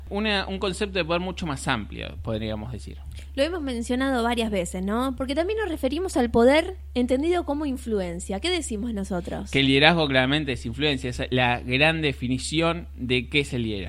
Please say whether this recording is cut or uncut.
cut